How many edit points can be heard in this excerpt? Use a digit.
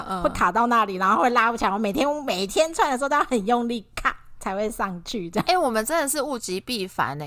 0